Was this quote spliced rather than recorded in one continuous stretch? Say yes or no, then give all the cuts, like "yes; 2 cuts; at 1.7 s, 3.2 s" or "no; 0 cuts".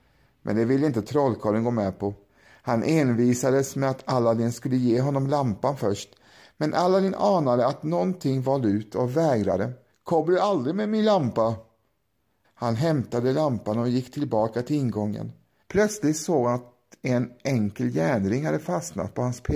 yes; 3 cuts; at 9.9 s, 12.4 s, 15.6 s